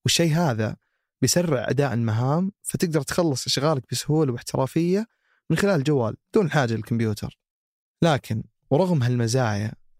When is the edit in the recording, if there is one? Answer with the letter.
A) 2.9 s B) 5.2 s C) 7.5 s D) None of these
D